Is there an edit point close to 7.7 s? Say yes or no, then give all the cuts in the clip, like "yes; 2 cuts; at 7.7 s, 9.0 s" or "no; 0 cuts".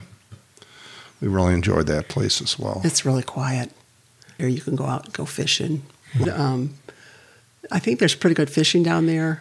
no; 2 cuts; at 4.4 s, 6.2 s